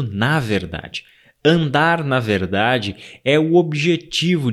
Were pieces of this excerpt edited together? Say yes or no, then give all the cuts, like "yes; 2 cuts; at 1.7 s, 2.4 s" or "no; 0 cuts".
no; 0 cuts